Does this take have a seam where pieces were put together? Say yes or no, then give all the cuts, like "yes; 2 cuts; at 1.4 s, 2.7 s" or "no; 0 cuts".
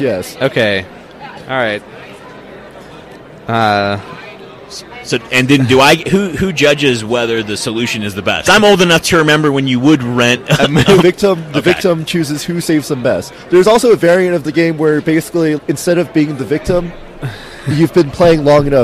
yes; 3 cuts; at 8.5 s, 11.0 s, 15.6 s